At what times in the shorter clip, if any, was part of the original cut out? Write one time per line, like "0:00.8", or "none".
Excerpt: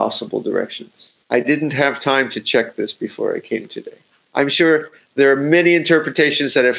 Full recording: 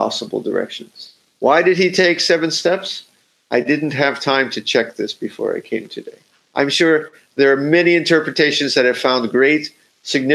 0:01.2